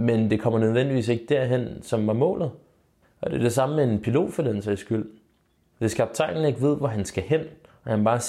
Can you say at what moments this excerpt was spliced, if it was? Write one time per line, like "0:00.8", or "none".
0:03.0
0:05.7

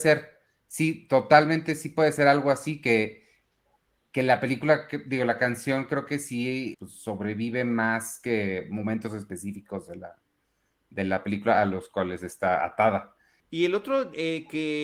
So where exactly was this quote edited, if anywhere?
0:06.7
0:13.4

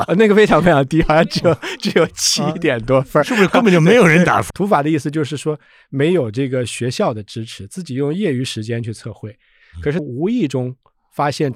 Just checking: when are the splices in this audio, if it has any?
0:04.5
0:10.0

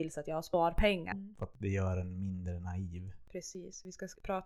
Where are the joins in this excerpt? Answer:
0:01.1

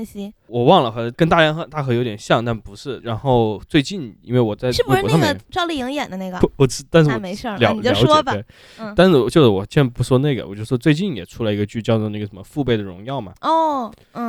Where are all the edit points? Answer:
0:06.4

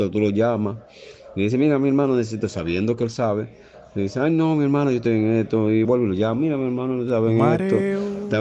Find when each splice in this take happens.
0:05.8

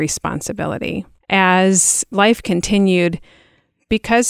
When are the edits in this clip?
0:01.2

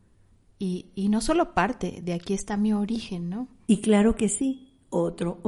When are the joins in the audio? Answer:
0:03.7

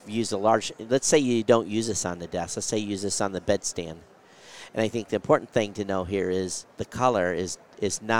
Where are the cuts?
0:06.7

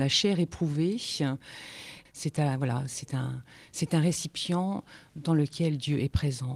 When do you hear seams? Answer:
0:02.1

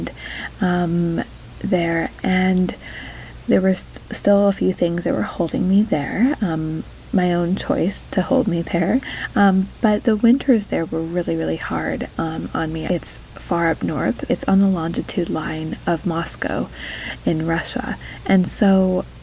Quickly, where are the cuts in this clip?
0:12.9
0:14.3

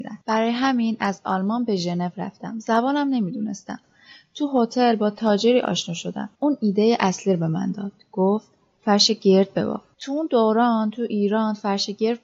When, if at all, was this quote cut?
none

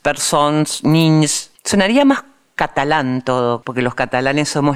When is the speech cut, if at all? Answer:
0:01.6
0:03.6

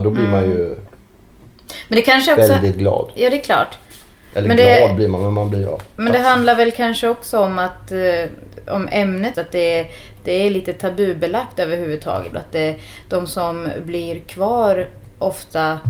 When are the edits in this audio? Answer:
0:09.3
0:12.3

